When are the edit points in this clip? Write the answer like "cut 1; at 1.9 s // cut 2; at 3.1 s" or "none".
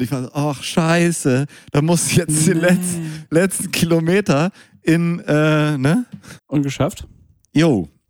cut 1; at 6.4 s